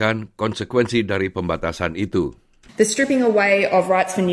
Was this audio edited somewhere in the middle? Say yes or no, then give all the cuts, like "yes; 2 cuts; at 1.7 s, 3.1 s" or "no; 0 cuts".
no; 0 cuts